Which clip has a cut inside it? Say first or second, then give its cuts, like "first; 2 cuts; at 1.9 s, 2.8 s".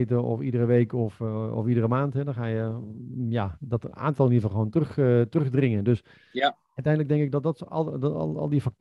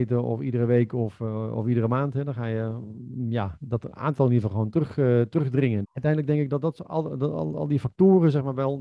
second; 1 cut; at 5.8 s